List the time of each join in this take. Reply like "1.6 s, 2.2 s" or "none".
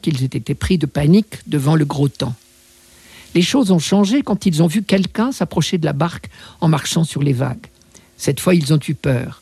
none